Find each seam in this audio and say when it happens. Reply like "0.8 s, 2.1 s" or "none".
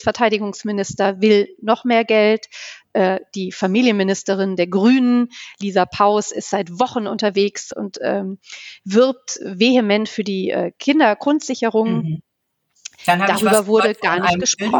none